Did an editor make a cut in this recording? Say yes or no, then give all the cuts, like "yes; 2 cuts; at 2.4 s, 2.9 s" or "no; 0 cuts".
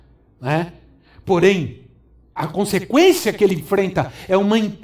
yes; 1 cut; at 2.4 s